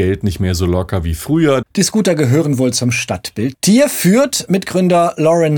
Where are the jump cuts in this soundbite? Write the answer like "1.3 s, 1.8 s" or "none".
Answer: 1.6 s, 3.5 s